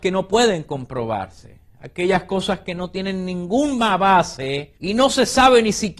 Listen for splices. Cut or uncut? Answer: cut